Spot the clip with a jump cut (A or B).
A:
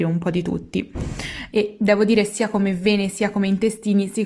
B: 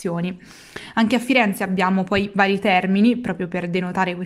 A